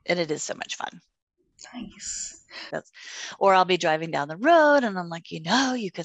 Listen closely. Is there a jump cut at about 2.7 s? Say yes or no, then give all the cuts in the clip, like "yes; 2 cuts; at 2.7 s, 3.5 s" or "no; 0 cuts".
yes; 1 cut; at 2.7 s